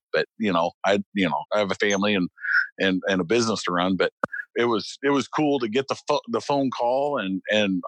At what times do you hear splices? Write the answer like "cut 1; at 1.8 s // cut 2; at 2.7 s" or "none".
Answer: cut 1; at 1.5 s // cut 2; at 4.5 s